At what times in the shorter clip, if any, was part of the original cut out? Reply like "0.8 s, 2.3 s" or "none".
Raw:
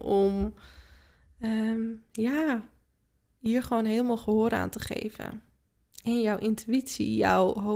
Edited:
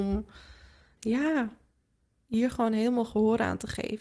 0.9 s

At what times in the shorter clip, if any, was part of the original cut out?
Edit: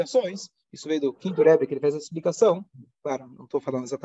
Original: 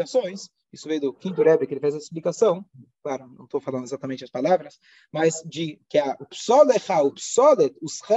none

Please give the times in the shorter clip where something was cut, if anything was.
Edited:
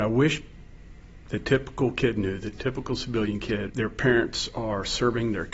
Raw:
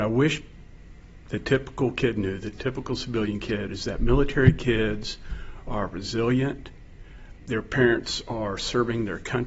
3.7 s

